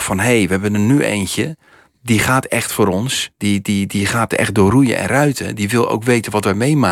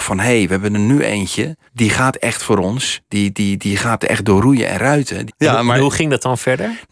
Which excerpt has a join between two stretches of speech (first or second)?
second